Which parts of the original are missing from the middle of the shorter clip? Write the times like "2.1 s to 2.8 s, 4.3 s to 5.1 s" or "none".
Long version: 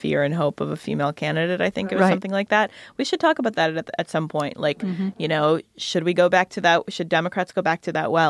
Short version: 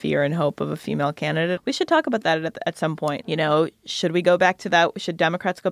1.6 s to 2.9 s, 4.5 s to 5.1 s